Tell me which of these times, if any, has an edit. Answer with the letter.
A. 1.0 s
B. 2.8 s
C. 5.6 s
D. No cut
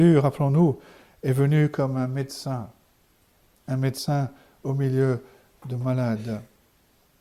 D